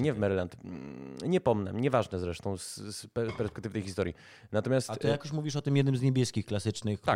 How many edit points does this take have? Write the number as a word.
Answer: zero